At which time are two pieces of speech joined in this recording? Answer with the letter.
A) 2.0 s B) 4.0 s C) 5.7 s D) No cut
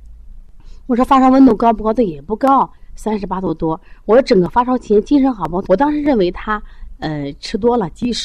C